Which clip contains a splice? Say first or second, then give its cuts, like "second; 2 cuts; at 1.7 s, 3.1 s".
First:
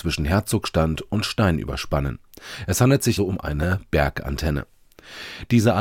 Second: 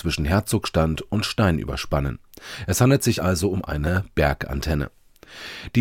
first; 1 cut; at 3.2 s